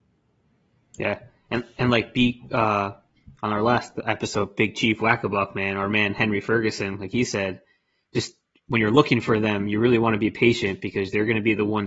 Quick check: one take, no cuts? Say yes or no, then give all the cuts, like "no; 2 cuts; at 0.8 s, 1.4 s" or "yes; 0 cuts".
yes; 0 cuts